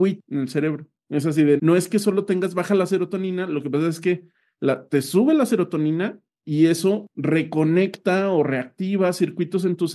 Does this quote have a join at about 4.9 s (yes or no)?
no